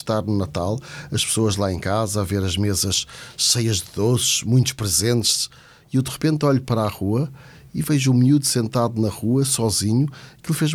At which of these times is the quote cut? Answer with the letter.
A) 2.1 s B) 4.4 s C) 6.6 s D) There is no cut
C